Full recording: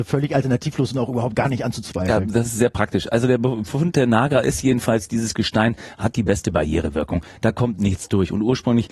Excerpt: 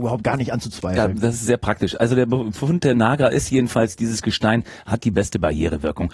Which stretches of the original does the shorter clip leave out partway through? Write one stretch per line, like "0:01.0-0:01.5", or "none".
none